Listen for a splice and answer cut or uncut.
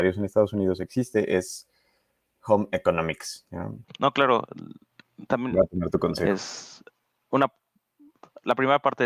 cut